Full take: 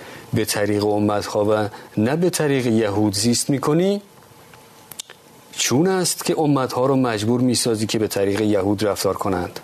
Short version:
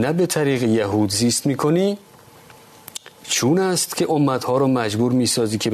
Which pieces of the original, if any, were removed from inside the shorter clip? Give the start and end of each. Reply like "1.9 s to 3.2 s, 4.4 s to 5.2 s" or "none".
5.2 s to 5.4 s